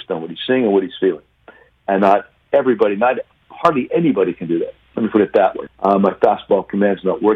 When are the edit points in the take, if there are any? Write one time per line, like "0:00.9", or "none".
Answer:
0:05.7